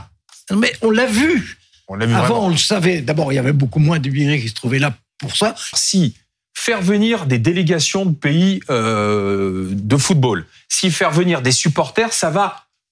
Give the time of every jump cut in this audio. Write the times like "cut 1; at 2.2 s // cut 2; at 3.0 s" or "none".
cut 1; at 5.7 s

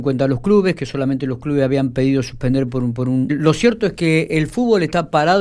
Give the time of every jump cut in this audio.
cut 1; at 3.3 s

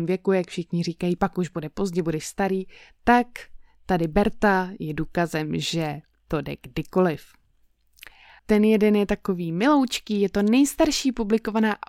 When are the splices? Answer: cut 1; at 8.4 s

